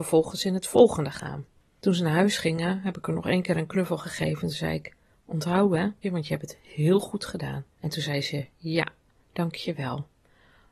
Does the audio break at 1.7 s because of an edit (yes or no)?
no